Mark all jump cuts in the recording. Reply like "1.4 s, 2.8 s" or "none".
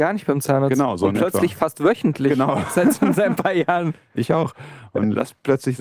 none